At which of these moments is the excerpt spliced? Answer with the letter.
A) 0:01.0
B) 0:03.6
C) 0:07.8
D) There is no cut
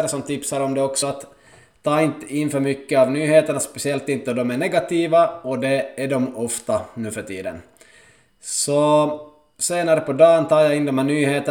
D